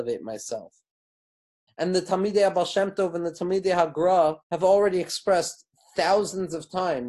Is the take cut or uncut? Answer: cut